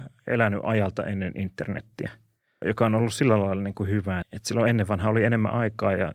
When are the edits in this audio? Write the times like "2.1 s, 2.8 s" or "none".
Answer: 2.6 s, 4.2 s